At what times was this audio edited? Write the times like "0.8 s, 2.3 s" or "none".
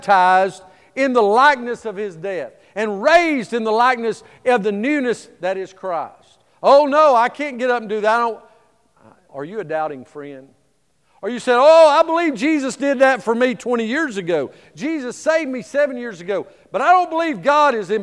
9.3 s